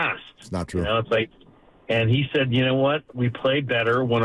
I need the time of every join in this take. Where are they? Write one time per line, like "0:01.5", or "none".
none